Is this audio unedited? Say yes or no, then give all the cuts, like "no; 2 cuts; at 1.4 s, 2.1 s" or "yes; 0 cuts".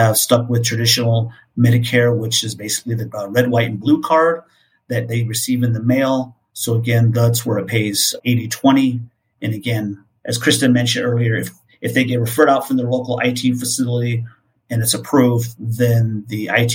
yes; 0 cuts